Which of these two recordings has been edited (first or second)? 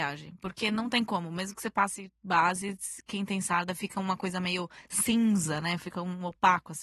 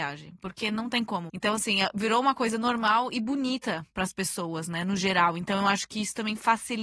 second